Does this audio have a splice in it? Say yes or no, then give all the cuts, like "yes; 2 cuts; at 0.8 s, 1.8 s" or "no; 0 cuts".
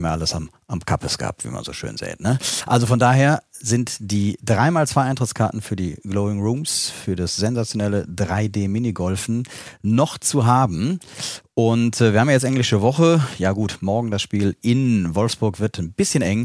no; 0 cuts